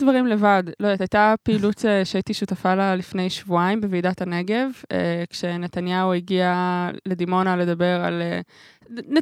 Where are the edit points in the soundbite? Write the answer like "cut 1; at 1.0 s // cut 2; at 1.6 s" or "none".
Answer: none